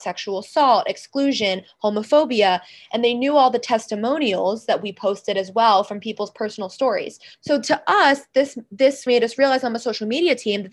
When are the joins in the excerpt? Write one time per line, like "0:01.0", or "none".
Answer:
0:07.3
0:09.1